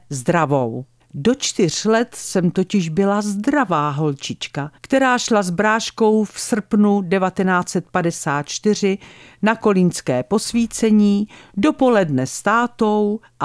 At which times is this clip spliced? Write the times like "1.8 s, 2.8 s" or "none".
1.0 s, 4.8 s